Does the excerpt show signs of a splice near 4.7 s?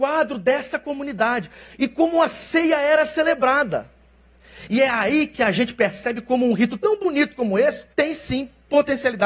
no; 1 cut; at 7.9 s

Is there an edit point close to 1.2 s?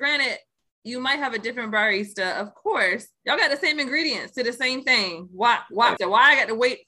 no; 2 cuts; at 3.1 s, 6.0 s

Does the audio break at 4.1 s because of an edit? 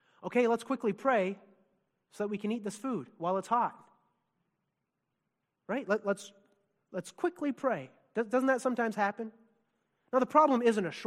no; 0 cuts

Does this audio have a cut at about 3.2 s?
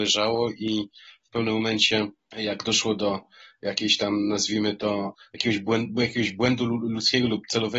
no; 0 cuts

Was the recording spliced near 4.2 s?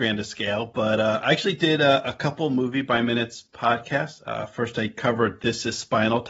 no; 0 cuts

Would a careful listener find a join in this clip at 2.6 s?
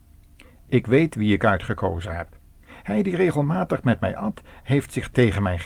yes; 1 cut; at 2.6 s

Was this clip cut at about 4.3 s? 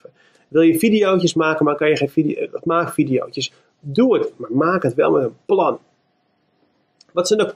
yes; 1 cut; at 4.3 s

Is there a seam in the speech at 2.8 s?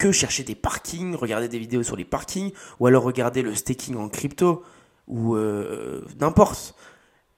yes; 1 cut; at 2.8 s

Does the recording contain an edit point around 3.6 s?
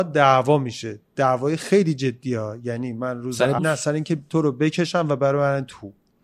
yes; 1 cut; at 3.6 s

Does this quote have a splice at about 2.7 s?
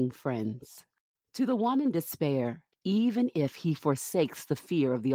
yes; 1 cut; at 2.7 s

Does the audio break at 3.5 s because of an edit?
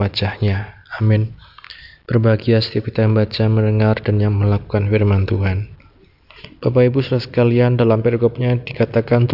no; 0 cuts

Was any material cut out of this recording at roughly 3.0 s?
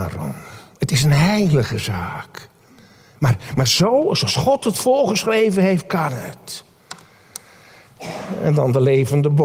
no; 0 cuts

